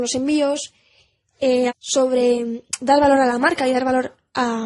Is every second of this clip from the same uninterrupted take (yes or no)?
no